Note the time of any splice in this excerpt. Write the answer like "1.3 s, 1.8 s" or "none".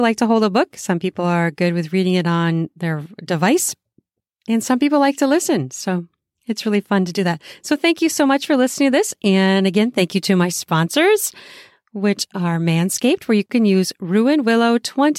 none